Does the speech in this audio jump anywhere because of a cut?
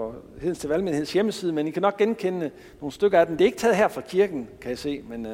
no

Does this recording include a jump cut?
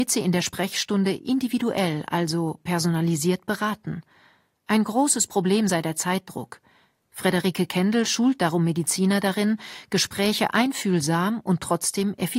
no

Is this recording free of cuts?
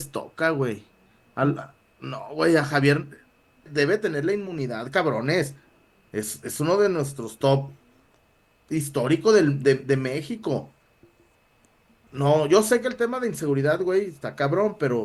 no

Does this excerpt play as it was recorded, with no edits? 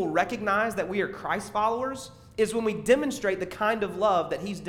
yes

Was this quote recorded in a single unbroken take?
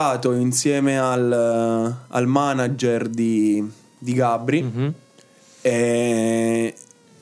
yes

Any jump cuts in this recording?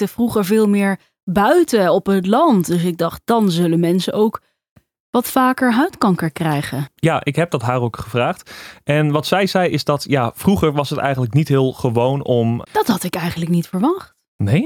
yes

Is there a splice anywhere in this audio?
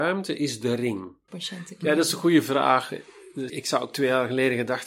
yes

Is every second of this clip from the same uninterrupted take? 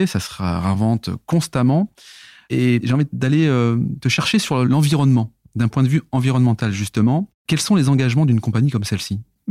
yes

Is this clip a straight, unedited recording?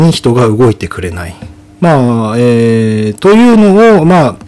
no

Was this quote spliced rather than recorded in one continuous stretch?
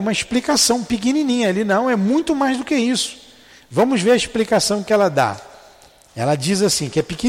no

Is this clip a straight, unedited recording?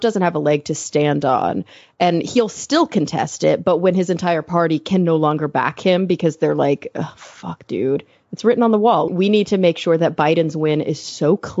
no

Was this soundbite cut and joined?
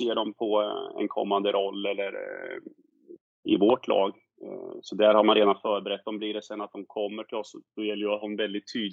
no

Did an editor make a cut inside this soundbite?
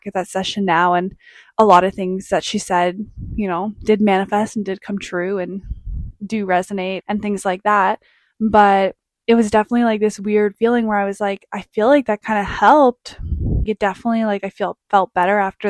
yes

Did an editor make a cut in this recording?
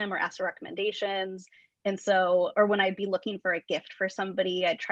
no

